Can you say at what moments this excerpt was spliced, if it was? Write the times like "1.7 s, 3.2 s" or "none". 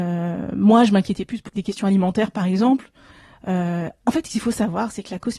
1.5 s